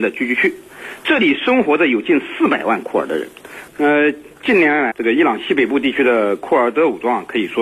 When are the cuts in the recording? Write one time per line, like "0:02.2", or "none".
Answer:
0:03.7
0:04.9